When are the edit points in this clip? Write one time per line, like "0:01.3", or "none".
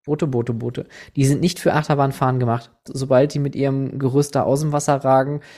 0:02.9